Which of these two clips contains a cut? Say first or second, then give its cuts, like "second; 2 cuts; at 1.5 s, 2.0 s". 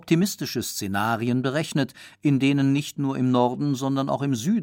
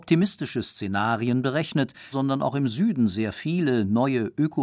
second; 1 cut; at 2.1 s